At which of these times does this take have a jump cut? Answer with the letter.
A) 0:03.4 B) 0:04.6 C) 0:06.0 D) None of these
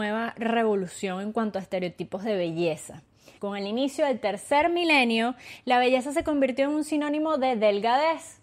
A